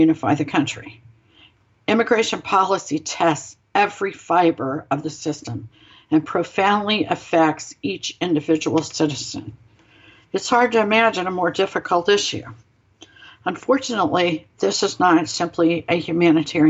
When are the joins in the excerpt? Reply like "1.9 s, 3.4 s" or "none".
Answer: none